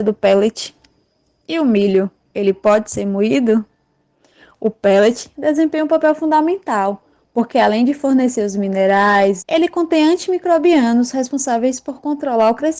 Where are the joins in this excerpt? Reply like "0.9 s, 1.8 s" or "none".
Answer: 9.4 s